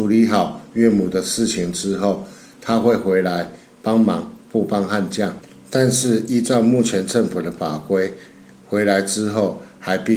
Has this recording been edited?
no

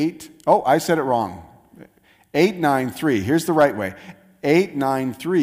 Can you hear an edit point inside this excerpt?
no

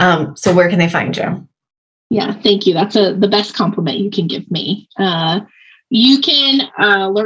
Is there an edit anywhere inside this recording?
no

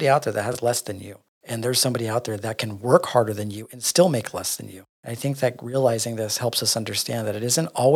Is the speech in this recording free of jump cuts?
yes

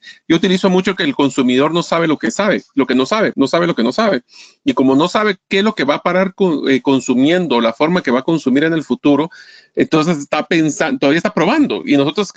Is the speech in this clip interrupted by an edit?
yes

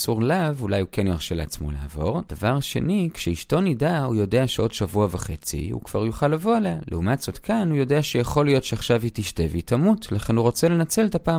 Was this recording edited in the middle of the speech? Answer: no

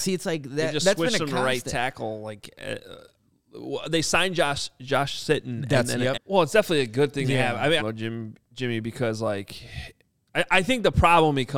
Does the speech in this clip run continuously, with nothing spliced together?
no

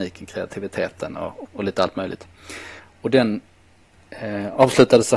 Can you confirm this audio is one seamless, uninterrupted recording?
no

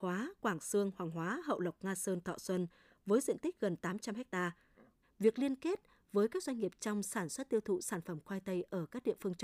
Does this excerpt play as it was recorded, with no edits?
no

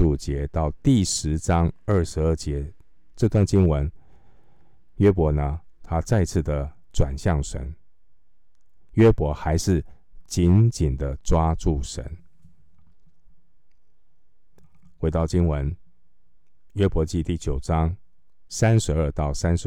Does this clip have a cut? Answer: no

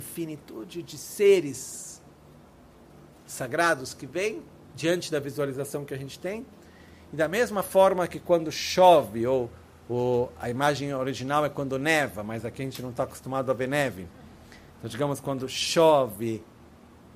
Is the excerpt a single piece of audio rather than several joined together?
yes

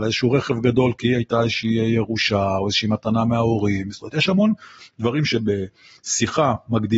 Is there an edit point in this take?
no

